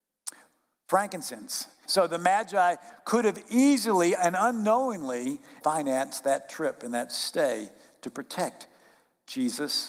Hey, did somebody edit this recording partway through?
yes; 2 cuts; at 1.9 s, 5.6 s

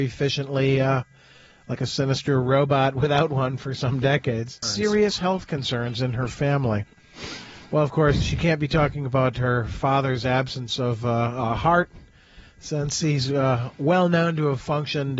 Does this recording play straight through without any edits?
no; 1 cut; at 4.6 s

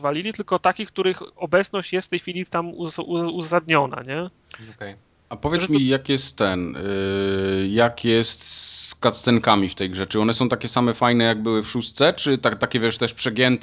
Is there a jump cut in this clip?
no; 0 cuts

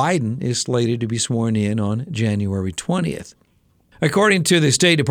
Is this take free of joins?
no; 1 cut; at 3.9 s

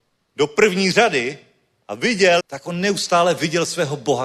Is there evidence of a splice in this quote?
yes; 1 cut; at 2.4 s

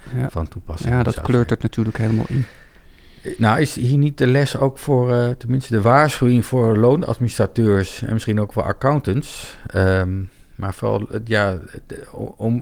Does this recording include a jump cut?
no; 0 cuts

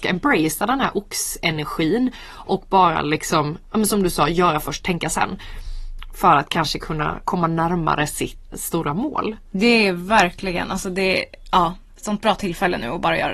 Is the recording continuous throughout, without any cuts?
no; 2 cuts; at 8.5 s, 11.9 s

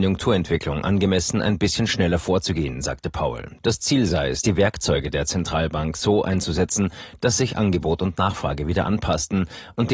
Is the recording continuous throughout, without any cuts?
yes; 0 cuts

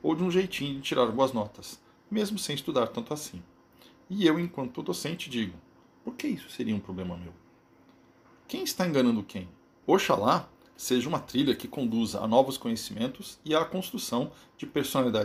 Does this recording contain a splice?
yes; 1 cut; at 9.8 s

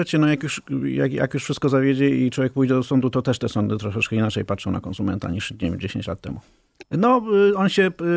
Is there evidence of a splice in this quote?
yes; 1 cut; at 6.8 s

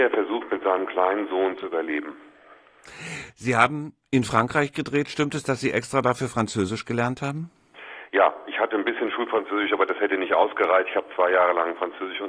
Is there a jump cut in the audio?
no; 0 cuts

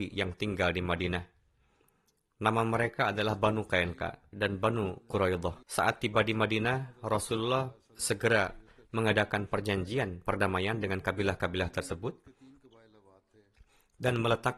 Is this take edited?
yes; 2 cuts; at 4.3 s, 5.6 s

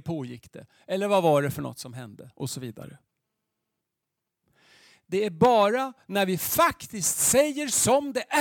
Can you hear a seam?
no; 0 cuts

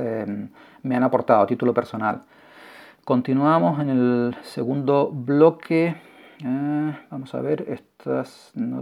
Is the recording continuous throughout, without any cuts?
yes; 0 cuts

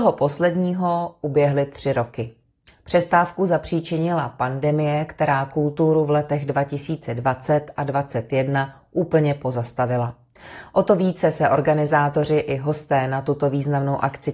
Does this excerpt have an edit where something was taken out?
no; 0 cuts

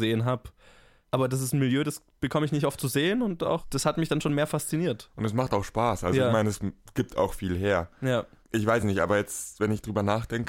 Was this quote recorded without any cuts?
yes; 0 cuts

